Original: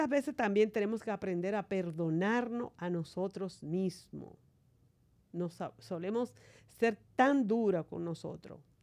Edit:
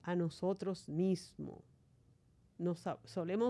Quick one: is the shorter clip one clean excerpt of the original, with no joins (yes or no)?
yes